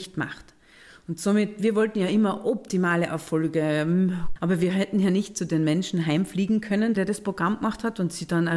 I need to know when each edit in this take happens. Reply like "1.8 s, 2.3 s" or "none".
4.4 s, 7.0 s